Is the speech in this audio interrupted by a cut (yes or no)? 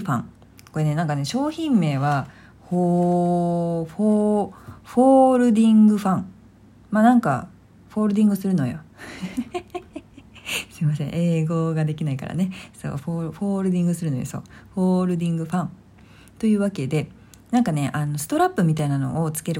no